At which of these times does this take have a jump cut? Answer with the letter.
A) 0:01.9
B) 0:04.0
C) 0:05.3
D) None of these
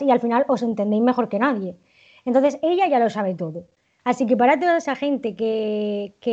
B